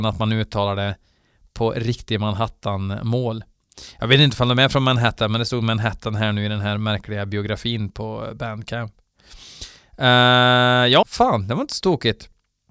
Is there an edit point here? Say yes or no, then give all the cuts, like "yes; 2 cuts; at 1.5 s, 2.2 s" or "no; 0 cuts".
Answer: yes; 1 cut; at 11.0 s